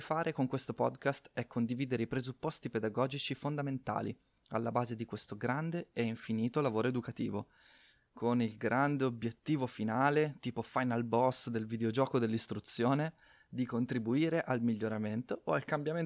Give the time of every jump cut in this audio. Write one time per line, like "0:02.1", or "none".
none